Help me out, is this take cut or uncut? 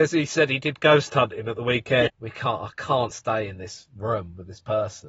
cut